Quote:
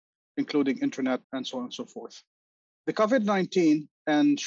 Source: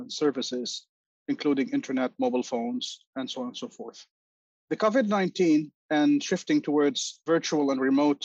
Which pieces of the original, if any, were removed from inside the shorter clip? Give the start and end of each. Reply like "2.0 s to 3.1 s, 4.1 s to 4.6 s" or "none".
2.1 s to 3.1 s